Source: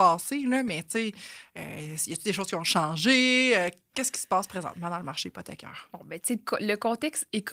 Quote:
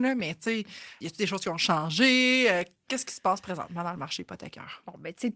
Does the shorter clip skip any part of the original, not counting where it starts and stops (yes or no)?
yes